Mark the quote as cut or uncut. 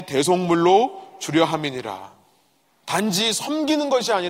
cut